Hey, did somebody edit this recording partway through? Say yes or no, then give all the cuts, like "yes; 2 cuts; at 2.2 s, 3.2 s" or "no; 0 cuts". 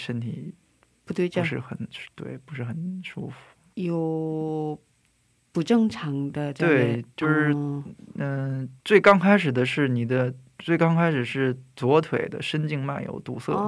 yes; 2 cuts; at 3.7 s, 8.8 s